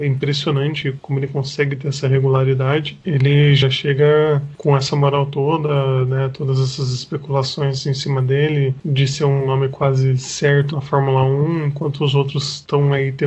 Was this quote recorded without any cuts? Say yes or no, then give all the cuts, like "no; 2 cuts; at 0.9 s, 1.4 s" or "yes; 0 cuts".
yes; 0 cuts